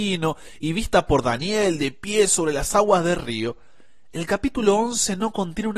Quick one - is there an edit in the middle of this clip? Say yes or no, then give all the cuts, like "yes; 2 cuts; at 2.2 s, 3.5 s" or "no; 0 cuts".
no; 0 cuts